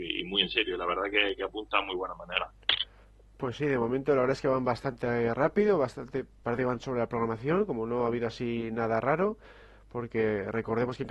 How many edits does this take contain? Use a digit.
0